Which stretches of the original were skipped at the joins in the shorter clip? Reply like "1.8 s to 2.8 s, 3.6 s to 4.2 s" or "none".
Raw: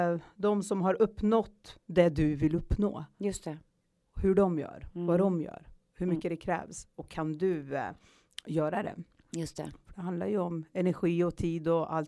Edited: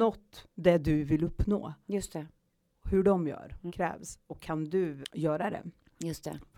5.0 s to 6.4 s, 7.7 s to 8.3 s